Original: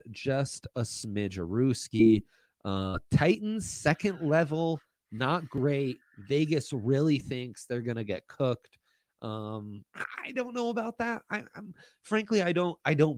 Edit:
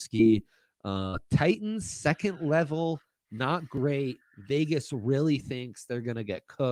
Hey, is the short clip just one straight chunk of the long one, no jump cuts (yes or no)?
yes